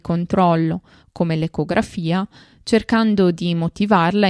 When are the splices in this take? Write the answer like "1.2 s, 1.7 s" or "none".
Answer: none